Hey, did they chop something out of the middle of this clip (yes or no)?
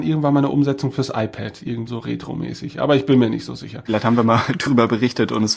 yes